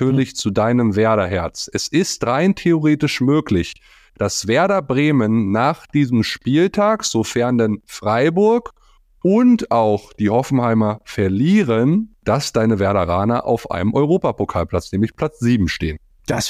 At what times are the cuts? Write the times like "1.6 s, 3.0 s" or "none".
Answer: none